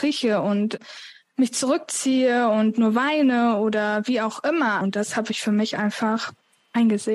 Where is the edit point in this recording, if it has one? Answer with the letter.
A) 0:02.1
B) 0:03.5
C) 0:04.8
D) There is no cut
C